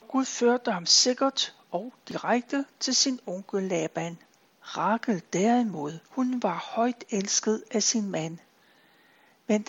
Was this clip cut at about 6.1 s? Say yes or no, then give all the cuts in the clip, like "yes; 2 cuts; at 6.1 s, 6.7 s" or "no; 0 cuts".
yes; 2 cuts; at 4.5 s, 6.1 s